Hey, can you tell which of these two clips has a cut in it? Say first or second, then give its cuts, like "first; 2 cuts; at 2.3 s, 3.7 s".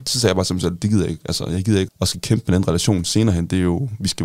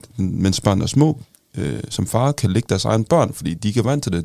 first; 1 cut; at 1.9 s